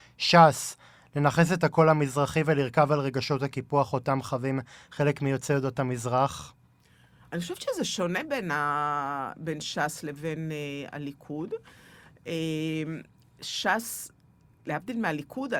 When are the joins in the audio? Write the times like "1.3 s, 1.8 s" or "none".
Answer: 14.6 s